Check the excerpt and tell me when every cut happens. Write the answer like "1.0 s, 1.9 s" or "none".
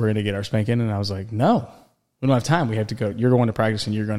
none